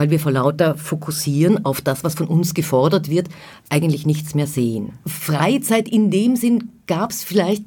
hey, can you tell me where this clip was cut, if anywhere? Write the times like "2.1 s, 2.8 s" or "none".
5.0 s